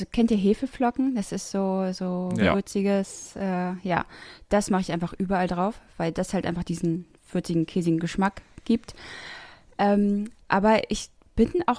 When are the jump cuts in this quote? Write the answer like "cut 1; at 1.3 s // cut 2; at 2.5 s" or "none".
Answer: none